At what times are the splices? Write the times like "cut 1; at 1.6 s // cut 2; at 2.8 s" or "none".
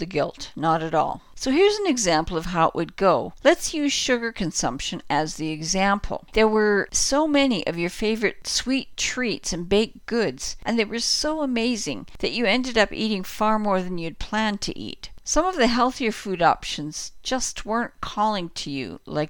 cut 1; at 6.3 s